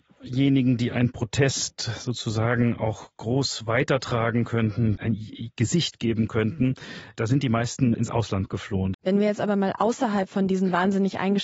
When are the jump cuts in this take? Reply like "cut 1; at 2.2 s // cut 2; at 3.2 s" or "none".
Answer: cut 1; at 5.0 s // cut 2; at 7.9 s // cut 3; at 8.9 s